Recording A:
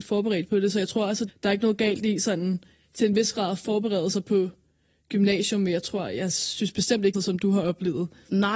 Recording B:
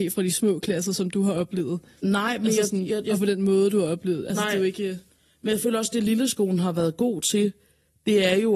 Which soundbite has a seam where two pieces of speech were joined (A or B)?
A